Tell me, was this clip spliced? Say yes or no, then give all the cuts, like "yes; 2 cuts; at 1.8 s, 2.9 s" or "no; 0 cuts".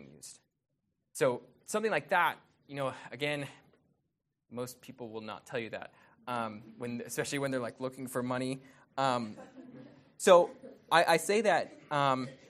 no; 0 cuts